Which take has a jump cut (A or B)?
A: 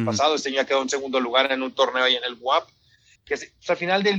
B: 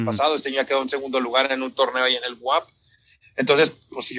A